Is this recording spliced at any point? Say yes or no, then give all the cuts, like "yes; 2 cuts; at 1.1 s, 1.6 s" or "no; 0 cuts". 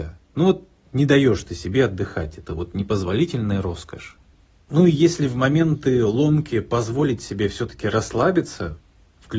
no; 0 cuts